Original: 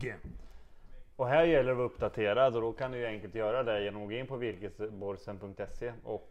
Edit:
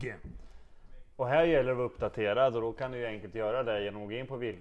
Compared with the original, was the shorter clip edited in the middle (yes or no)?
no